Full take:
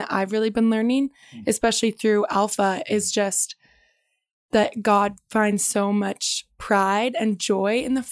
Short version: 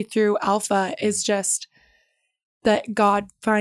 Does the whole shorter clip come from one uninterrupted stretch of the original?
yes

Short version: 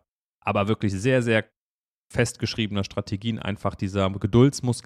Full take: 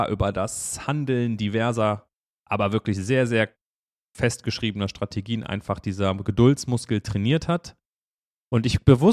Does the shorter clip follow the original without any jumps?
yes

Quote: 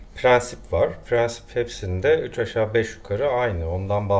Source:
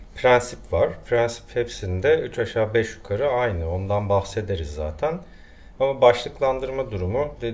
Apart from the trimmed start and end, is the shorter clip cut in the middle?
no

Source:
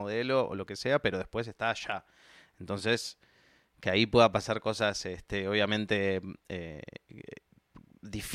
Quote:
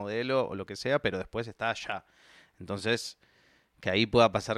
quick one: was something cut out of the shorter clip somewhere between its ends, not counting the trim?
no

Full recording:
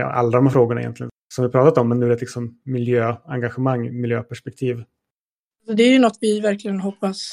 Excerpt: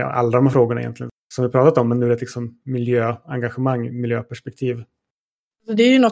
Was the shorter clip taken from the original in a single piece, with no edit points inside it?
yes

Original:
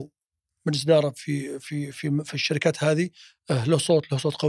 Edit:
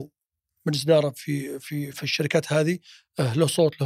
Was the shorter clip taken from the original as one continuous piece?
no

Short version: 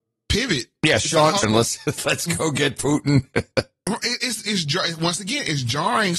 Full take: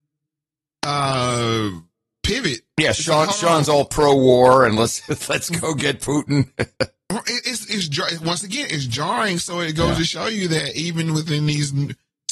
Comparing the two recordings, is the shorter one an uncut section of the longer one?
no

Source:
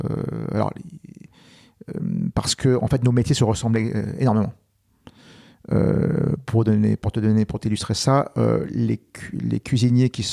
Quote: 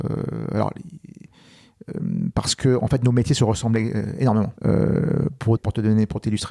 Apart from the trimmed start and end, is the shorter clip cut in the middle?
yes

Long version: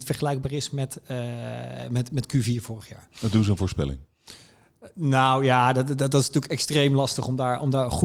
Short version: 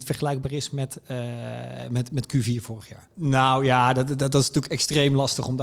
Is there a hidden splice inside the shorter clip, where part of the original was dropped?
yes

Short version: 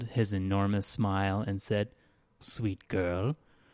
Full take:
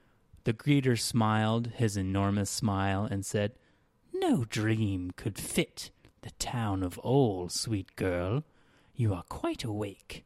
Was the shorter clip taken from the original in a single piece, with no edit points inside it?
no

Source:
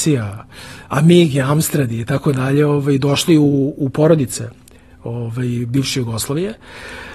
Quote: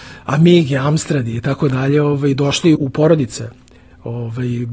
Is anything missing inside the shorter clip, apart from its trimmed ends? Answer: yes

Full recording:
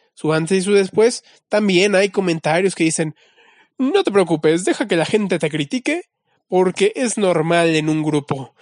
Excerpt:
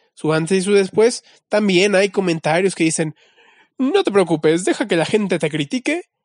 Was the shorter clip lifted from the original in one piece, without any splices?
yes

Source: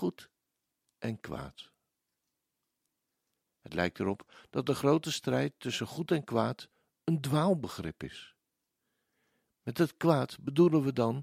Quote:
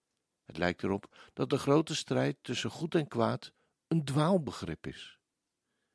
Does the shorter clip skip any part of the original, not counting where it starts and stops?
no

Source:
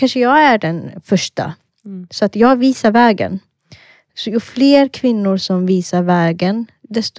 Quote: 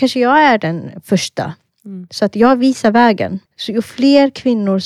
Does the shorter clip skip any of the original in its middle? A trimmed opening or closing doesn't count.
yes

